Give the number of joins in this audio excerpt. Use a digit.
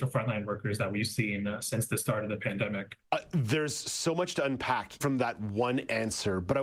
2